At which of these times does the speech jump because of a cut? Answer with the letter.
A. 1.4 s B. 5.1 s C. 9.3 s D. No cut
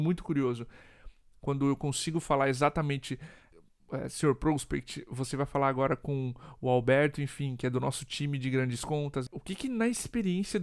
A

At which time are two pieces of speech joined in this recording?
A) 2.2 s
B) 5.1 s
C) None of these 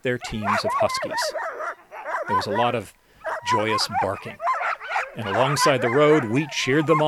C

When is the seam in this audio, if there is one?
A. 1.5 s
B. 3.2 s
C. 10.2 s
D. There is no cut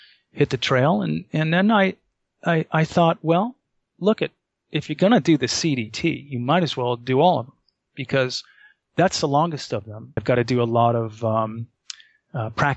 C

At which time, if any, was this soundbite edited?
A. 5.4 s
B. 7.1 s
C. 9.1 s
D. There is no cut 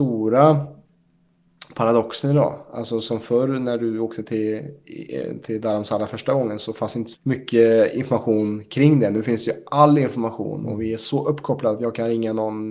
B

